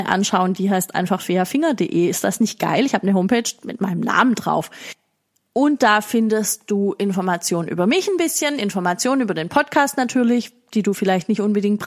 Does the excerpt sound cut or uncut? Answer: uncut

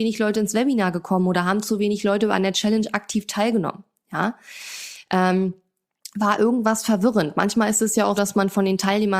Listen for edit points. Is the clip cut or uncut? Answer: cut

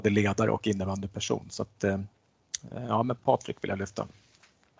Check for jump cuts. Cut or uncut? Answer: uncut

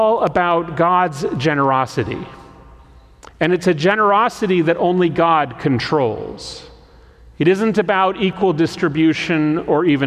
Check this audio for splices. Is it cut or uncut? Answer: uncut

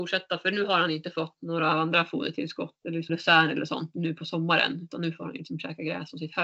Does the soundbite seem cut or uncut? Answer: cut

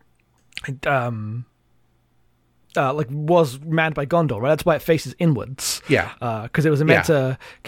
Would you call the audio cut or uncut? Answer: uncut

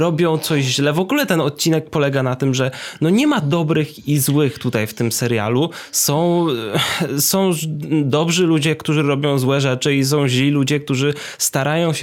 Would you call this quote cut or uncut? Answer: uncut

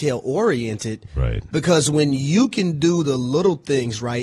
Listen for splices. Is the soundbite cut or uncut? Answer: cut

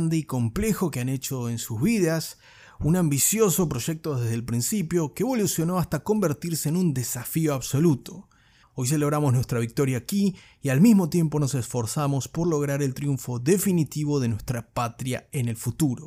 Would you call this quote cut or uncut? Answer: cut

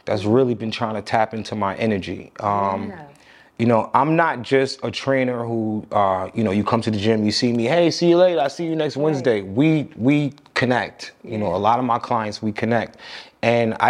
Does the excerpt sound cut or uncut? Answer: uncut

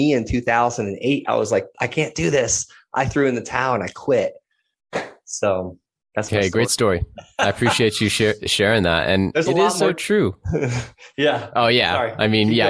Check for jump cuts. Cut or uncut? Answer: uncut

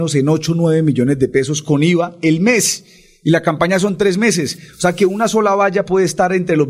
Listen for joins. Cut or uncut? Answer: uncut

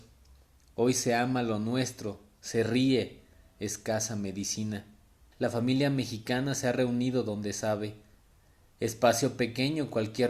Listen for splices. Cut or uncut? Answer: cut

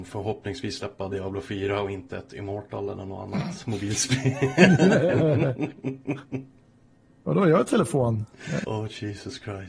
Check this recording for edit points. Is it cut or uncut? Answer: cut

